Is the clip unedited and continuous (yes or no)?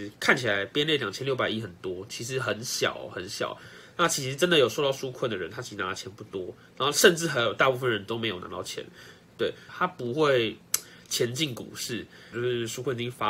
no